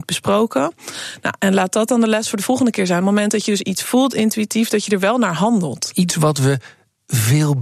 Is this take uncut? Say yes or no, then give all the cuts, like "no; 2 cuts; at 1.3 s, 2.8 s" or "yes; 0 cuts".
yes; 0 cuts